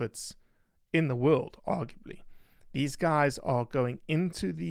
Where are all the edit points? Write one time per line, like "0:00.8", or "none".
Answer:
none